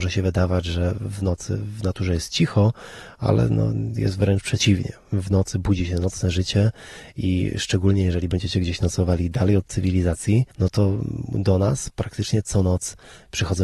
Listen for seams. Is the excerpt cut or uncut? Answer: cut